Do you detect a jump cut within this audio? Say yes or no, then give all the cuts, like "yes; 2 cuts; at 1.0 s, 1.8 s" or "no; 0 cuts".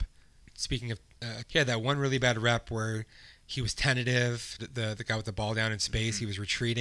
yes; 2 cuts; at 1.5 s, 4.6 s